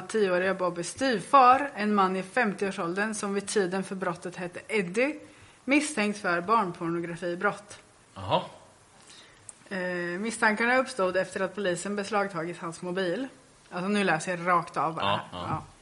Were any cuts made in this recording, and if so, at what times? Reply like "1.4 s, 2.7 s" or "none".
none